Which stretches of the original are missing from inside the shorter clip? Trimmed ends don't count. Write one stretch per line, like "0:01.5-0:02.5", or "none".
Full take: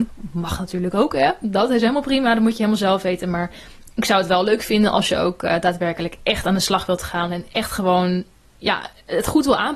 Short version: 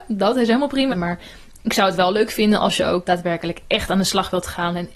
0:02.2-0:03.2
0:05.4-0:05.6